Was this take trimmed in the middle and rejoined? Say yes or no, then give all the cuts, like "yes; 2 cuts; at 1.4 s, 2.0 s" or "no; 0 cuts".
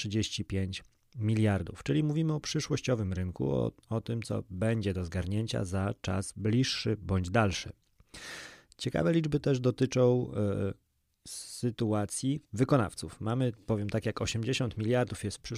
no; 0 cuts